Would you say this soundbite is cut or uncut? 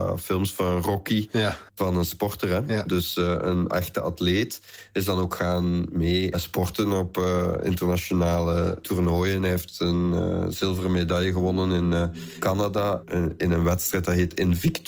uncut